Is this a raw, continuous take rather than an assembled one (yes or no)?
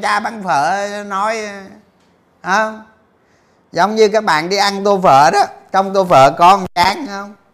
yes